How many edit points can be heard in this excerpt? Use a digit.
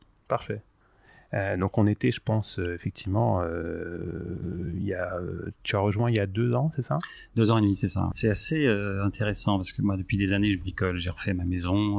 1